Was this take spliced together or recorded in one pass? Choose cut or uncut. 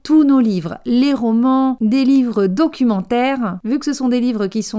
cut